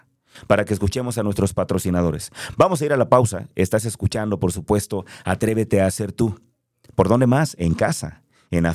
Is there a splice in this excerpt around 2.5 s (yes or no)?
no